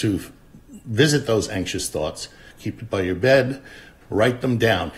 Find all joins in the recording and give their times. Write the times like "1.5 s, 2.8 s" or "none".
2.5 s, 4.0 s